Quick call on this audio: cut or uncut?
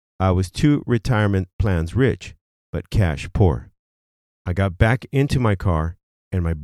cut